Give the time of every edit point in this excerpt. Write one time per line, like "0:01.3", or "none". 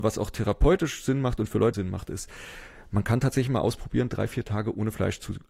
0:01.7